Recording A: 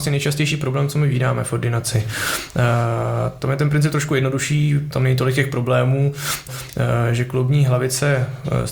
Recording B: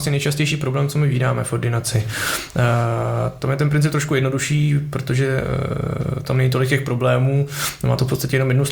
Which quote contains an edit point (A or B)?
A